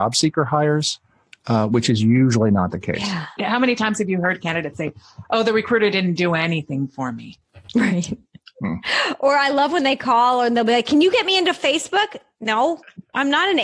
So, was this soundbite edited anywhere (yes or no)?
no